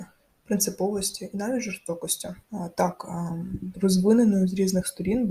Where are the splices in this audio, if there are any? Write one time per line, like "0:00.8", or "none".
0:02.4
0:03.7